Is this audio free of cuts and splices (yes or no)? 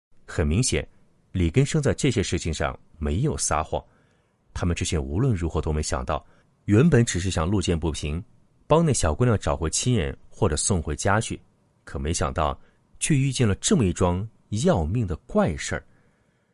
no